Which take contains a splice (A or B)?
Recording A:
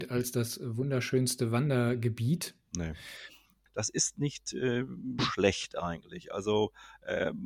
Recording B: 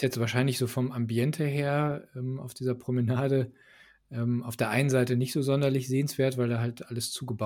A